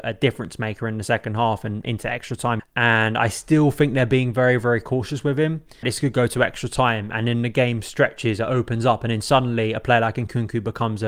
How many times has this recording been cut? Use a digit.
2